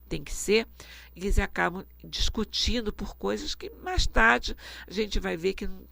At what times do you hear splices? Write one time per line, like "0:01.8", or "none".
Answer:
none